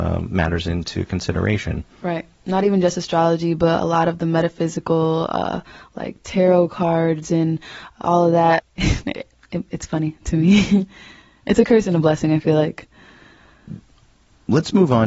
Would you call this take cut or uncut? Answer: cut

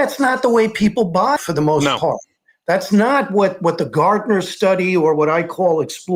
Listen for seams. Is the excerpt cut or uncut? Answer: cut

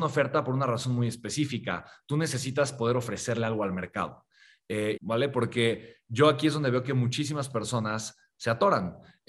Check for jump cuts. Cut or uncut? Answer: cut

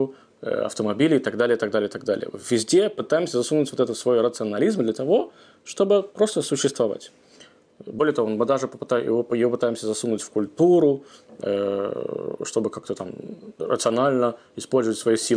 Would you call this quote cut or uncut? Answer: uncut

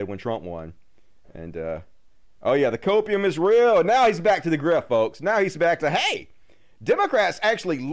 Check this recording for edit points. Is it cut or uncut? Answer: uncut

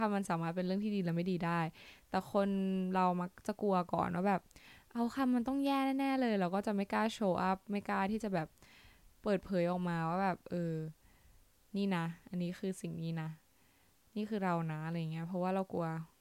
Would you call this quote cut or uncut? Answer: uncut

